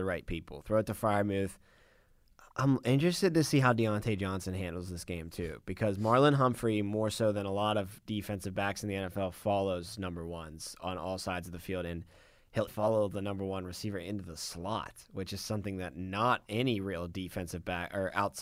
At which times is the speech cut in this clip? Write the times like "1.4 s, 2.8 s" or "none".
12.7 s